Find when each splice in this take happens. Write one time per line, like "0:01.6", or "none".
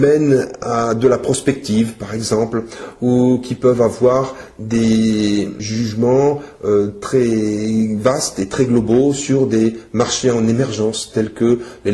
0:05.6